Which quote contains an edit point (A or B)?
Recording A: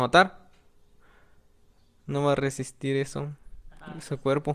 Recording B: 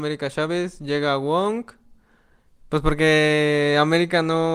B